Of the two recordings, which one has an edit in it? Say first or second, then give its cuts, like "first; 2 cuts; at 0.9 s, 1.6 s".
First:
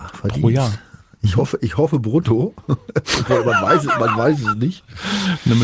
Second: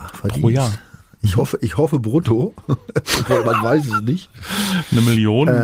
second; 1 cut; at 3.4 s